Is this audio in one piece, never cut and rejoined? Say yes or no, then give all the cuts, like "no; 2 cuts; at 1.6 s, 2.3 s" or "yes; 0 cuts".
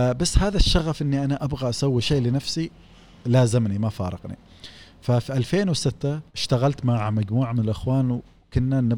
no; 1 cut; at 6.3 s